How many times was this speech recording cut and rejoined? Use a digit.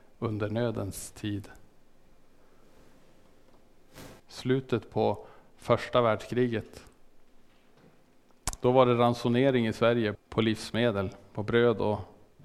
2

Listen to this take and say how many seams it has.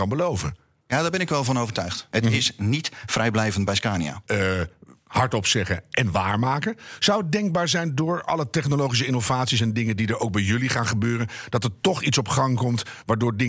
2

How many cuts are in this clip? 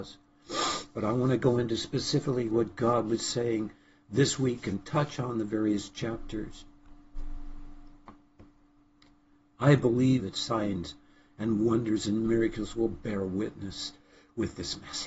1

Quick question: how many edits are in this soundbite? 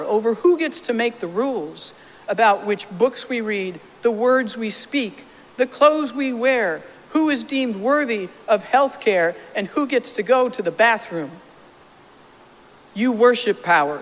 0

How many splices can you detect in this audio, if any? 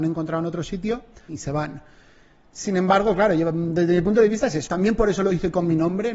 2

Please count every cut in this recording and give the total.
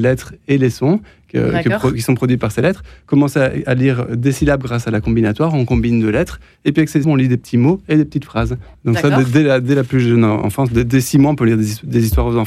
2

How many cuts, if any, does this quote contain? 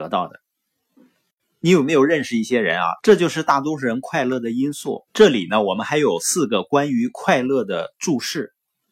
2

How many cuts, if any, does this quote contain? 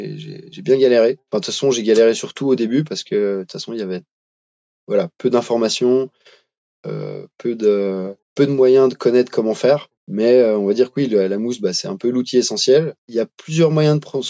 3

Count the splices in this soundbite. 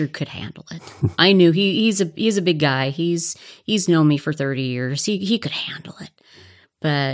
0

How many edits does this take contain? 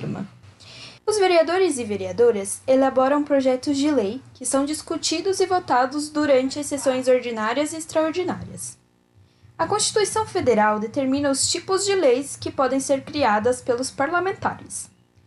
1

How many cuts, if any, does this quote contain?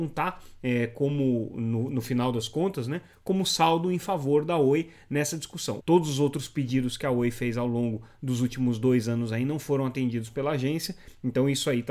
1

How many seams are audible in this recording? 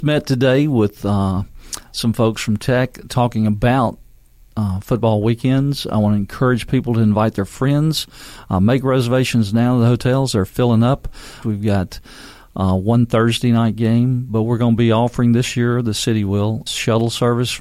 2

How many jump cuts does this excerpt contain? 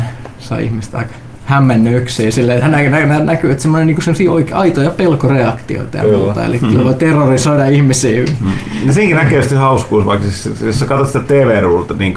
1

